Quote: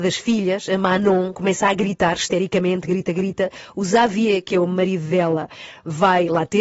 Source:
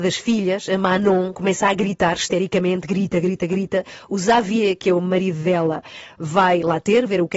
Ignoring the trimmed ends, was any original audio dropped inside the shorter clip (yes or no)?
yes